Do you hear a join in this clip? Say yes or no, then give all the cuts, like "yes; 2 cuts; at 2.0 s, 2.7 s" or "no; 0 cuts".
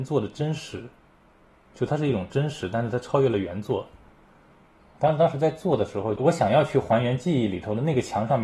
yes; 1 cut; at 6.2 s